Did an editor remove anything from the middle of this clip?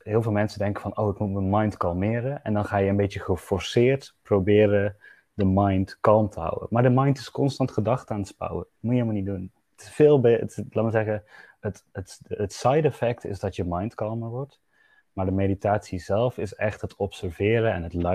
no; 0 cuts

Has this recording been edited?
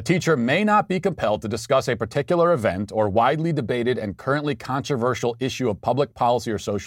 no; 0 cuts

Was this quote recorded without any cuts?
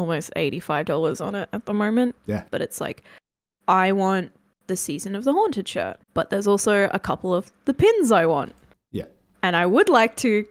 no; 2 cuts; at 2.5 s, 6.0 s

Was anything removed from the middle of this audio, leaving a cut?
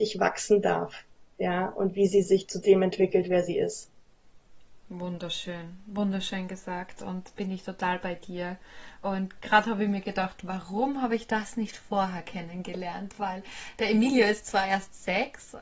no; 0 cuts

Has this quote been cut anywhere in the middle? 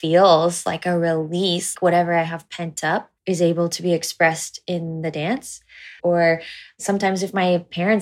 yes; 3 cuts; at 1.7 s, 3.2 s, 6.0 s

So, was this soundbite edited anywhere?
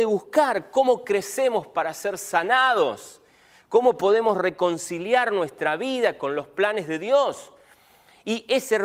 no; 0 cuts

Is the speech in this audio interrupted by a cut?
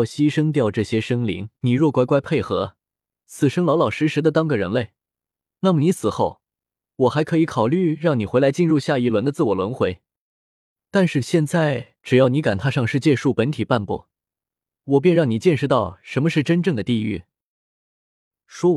yes; 1 cut; at 1.6 s

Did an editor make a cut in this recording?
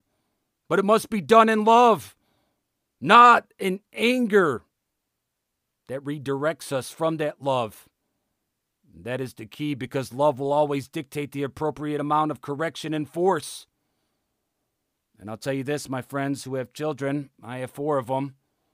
no; 0 cuts

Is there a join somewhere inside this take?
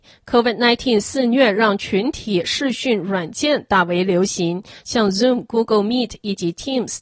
no; 0 cuts

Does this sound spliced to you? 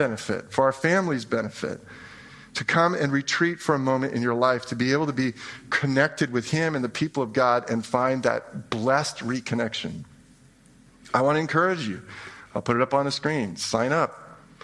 no; 0 cuts

